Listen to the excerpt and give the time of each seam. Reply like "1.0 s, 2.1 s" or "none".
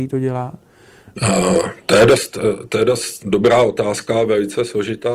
1.2 s, 3.2 s